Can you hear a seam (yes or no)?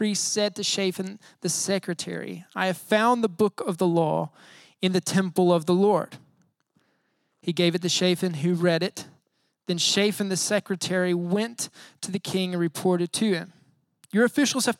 no